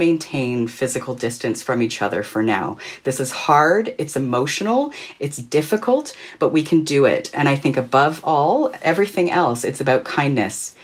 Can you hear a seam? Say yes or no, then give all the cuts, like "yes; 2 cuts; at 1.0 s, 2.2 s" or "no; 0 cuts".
no; 0 cuts